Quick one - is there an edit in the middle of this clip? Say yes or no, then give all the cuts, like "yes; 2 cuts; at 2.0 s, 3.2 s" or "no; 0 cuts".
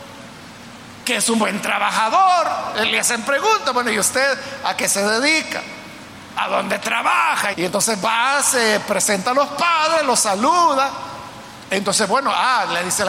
yes; 2 cuts; at 7.5 s, 11.6 s